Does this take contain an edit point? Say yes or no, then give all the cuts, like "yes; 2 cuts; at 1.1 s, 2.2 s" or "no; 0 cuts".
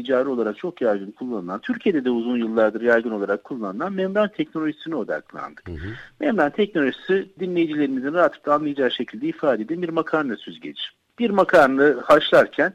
no; 0 cuts